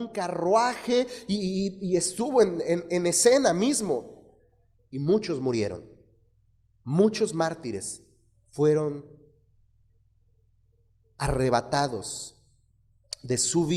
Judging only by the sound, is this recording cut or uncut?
cut